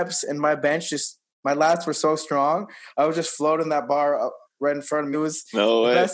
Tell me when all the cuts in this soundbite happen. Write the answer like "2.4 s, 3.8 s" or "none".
5.1 s

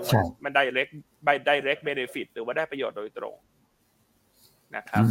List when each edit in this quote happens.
none

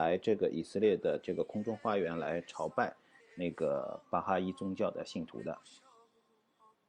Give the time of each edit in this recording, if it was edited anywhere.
3.2 s

